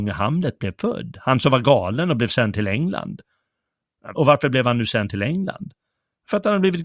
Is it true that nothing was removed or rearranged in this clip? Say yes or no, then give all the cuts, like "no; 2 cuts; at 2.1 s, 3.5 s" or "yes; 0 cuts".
no; 1 cut; at 4.1 s